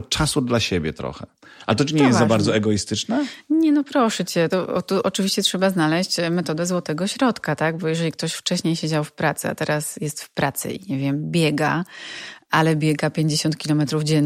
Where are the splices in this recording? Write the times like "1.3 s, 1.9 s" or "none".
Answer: none